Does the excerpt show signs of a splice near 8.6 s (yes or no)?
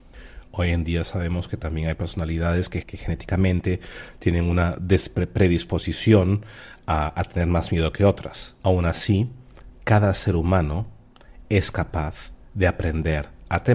yes